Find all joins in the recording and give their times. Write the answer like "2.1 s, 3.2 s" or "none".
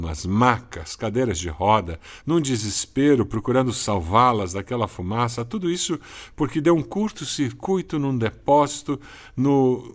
2.2 s